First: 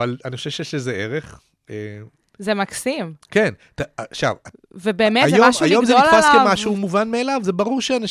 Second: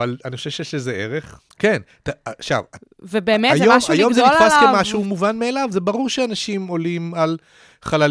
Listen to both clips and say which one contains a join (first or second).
second